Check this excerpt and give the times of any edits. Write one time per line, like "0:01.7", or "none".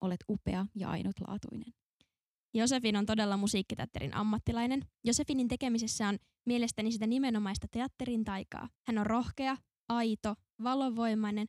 0:08.8